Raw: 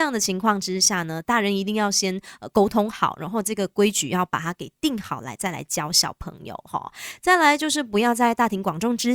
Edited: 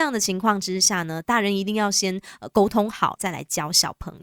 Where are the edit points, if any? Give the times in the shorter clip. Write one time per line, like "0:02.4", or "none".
0:03.2